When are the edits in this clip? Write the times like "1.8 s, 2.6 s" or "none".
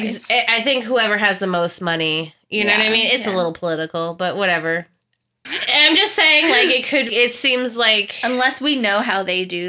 5.5 s, 7.1 s